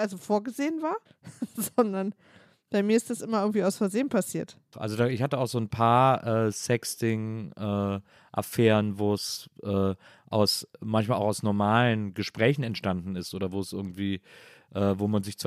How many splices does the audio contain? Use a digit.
2